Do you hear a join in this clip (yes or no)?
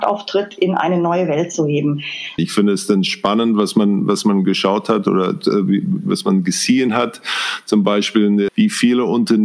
yes